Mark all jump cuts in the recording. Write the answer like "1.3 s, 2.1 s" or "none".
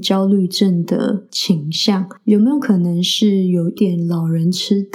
3.8 s